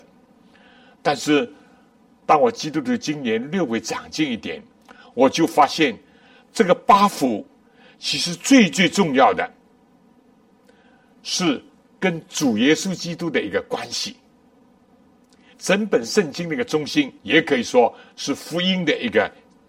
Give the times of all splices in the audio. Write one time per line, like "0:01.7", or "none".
0:15.5
0:17.2